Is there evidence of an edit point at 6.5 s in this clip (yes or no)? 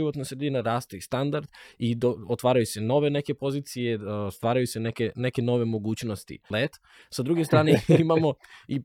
yes